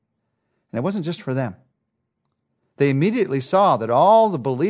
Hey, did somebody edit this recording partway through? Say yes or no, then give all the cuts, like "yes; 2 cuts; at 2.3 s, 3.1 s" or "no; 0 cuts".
no; 0 cuts